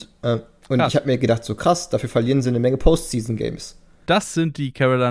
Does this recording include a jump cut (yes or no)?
yes